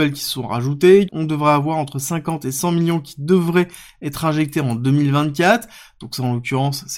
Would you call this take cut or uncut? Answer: cut